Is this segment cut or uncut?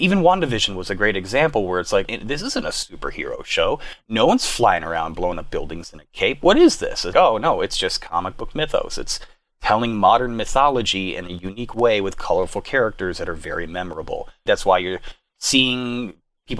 cut